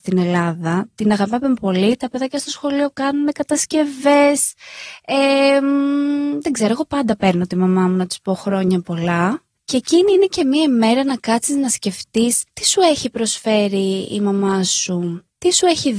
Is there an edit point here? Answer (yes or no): no